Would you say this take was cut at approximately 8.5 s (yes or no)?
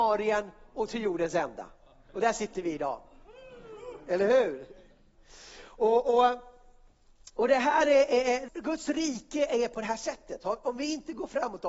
yes